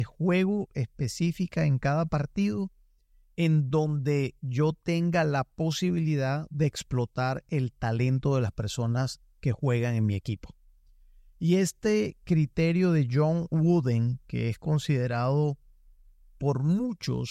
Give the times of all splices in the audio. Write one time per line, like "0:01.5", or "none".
none